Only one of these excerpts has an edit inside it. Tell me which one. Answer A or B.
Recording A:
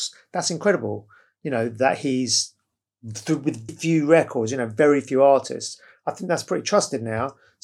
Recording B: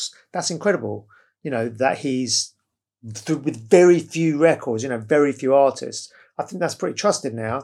A